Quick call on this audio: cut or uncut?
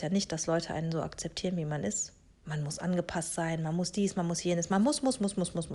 uncut